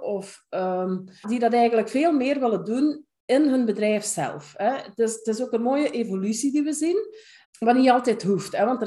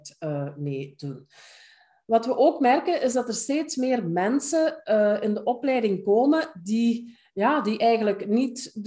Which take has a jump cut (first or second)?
first